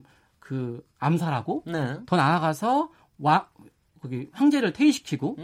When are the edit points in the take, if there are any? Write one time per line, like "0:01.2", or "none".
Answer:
none